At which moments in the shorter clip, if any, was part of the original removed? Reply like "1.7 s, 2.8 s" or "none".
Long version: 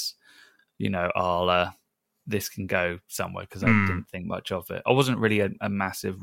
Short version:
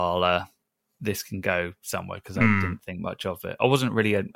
none

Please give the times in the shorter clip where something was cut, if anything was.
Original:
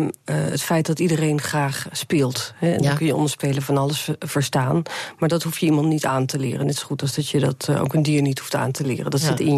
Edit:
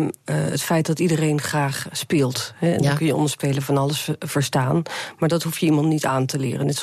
none

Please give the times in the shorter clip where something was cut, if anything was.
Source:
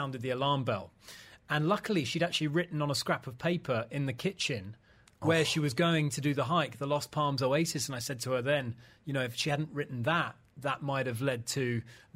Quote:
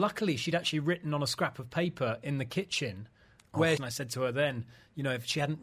3.8 s

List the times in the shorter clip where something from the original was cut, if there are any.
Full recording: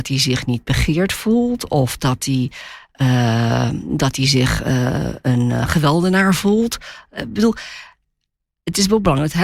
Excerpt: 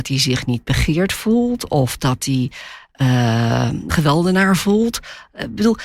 3.9 s

